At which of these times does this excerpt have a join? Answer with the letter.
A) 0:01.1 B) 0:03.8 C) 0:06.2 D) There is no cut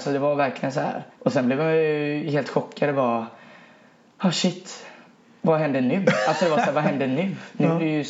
A